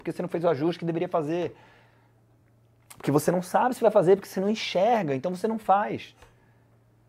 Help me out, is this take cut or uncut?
uncut